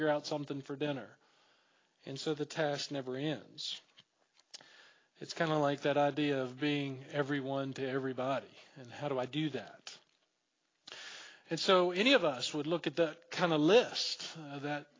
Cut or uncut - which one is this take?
uncut